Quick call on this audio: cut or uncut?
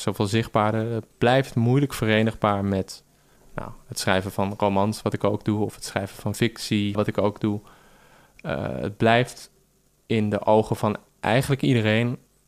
cut